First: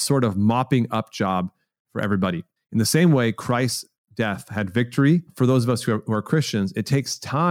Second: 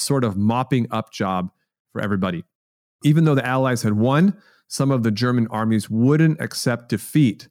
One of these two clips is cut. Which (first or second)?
first